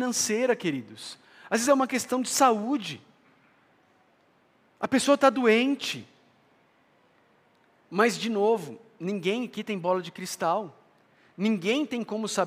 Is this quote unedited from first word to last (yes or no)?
yes